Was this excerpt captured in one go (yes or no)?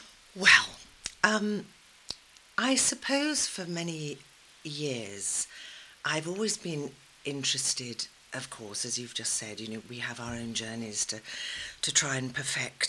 no